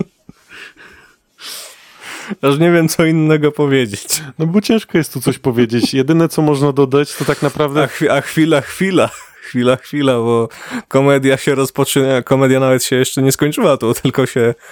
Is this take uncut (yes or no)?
yes